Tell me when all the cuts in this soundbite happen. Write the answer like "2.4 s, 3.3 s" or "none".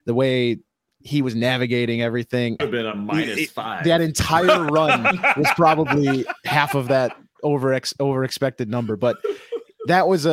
2.6 s